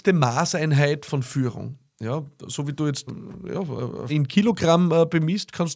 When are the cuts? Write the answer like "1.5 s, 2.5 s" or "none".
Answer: 3.1 s, 4.1 s